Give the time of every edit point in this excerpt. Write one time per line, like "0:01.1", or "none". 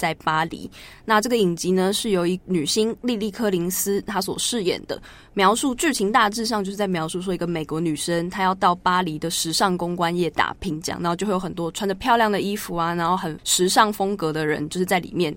none